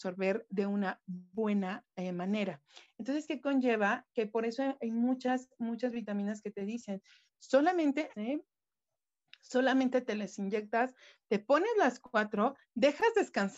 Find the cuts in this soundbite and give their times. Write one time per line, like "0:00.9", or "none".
0:08.1